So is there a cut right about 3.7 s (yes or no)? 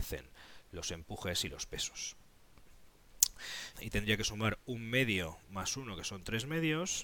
yes